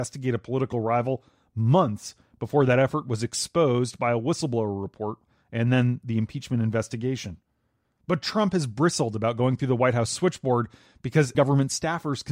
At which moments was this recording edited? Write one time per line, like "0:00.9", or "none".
0:07.8
0:11.3